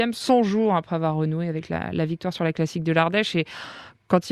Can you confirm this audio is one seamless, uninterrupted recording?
yes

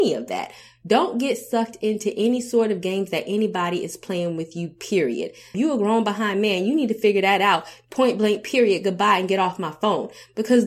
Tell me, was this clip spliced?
yes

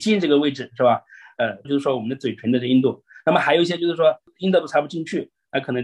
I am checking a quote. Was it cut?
yes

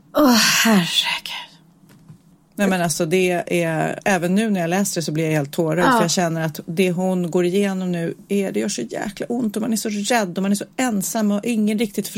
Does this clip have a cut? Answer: yes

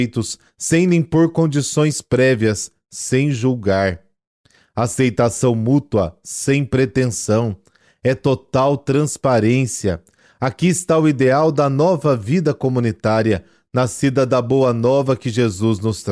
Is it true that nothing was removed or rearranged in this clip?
yes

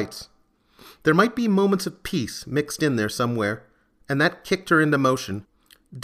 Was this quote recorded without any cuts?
yes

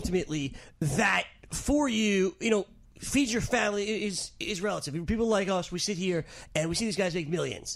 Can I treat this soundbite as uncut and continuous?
yes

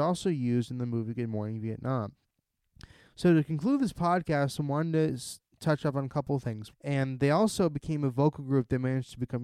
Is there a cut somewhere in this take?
yes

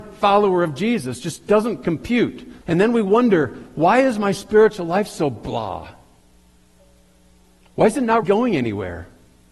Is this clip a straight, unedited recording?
no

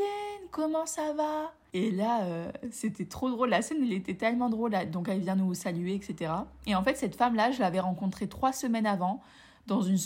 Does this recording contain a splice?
no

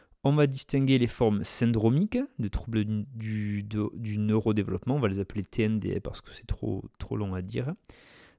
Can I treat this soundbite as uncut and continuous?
yes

